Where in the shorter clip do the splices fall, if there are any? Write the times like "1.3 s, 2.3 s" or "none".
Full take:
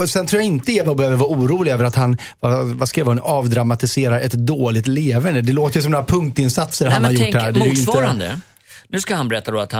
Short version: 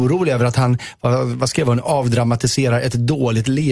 none